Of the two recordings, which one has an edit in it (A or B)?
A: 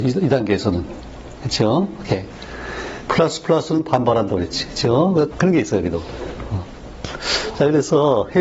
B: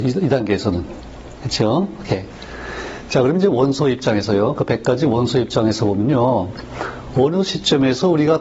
A